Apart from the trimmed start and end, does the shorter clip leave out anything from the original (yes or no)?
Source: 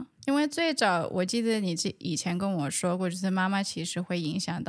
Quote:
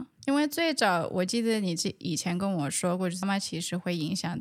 yes